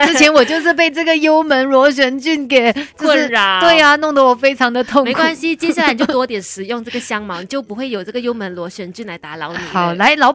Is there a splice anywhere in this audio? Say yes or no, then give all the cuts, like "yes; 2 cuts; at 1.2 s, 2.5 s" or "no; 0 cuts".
no; 0 cuts